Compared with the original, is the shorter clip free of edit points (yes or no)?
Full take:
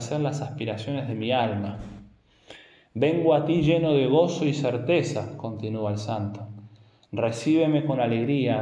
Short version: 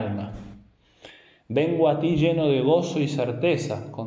yes